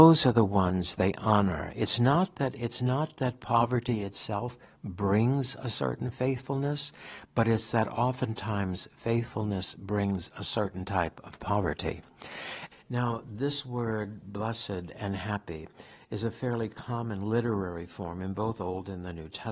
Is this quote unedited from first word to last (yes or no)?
no